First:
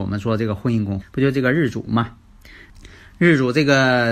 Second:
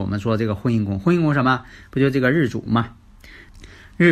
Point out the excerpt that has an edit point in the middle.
first; 1 cut; at 1.0 s

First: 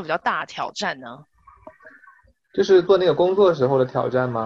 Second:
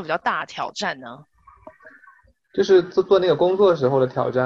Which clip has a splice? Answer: first; 1 cut; at 2.8 s

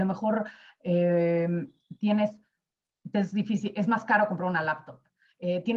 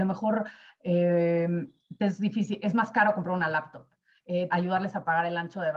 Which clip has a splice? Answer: second; 2 cuts; at 2.0 s, 4.5 s

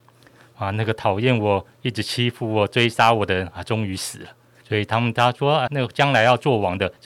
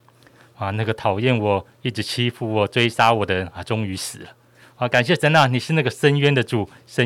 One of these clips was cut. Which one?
first; 2 cuts; at 4.6 s, 5.7 s

